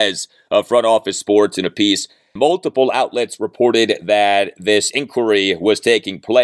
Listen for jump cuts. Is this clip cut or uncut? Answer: cut